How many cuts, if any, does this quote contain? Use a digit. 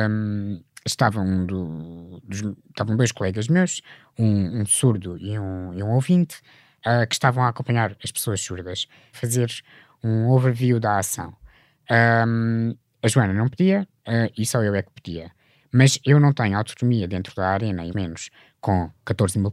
2